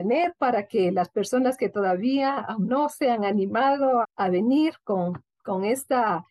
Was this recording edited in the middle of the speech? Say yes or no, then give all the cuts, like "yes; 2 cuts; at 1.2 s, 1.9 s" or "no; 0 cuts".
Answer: yes; 1 cut; at 4.0 s